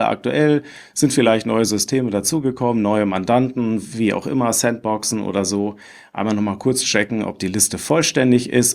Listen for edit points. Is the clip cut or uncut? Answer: uncut